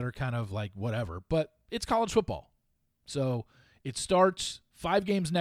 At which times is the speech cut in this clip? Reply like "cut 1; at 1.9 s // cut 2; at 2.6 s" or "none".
none